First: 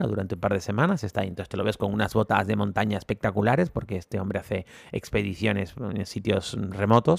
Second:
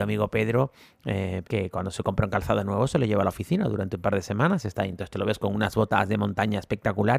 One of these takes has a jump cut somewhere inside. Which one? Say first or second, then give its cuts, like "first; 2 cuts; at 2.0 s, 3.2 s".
second; 1 cut; at 1.4 s